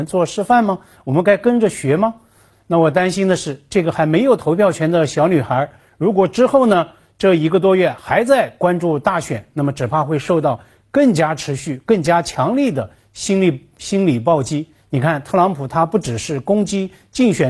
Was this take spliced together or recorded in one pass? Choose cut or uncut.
uncut